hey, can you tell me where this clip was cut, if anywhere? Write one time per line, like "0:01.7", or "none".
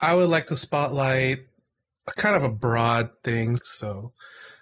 0:03.6